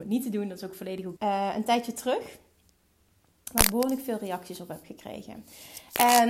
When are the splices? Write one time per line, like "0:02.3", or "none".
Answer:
0:01.2